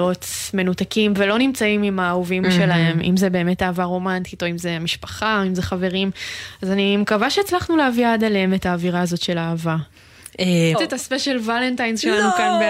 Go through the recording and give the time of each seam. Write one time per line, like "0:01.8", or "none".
0:10.7